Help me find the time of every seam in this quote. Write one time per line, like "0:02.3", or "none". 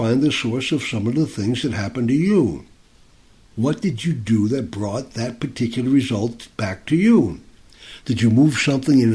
0:08.0